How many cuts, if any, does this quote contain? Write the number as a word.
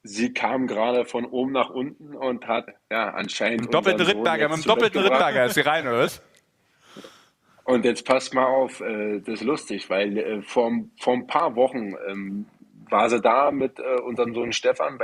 one